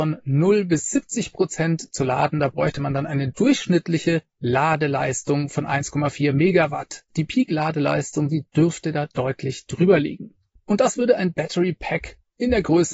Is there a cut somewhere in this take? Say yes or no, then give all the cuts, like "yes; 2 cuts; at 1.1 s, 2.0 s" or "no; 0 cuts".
yes; 2 cuts; at 7.1 s, 10.6 s